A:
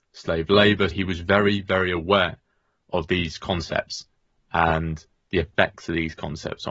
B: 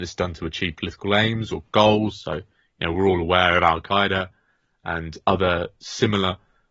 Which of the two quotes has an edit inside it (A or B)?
A